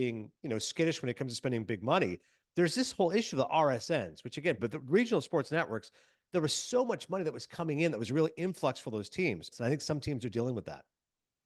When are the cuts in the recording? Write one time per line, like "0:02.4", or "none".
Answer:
0:04.6
0:09.5